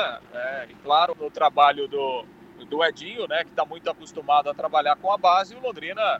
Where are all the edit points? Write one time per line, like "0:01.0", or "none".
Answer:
0:01.1